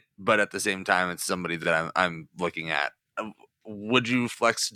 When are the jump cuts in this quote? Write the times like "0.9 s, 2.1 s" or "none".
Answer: none